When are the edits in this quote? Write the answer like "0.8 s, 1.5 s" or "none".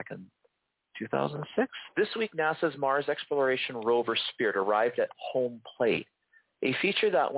1.9 s

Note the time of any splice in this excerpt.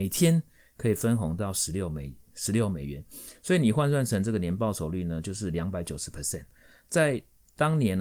none

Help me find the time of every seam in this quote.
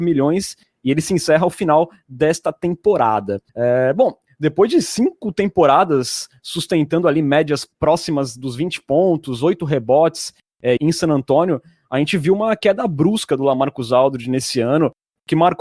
3.5 s, 7.7 s, 10.8 s

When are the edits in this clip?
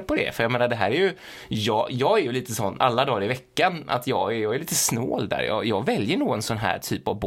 none

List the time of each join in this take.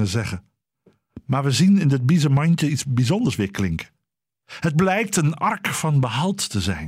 none

